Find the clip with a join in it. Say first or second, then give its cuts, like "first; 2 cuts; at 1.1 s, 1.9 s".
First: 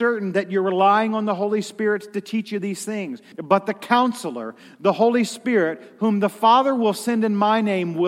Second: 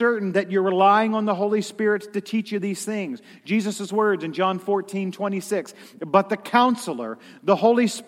first; 1 cut; at 3.3 s